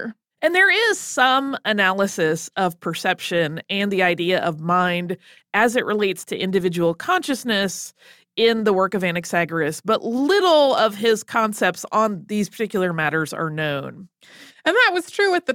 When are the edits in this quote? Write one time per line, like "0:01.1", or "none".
0:14.5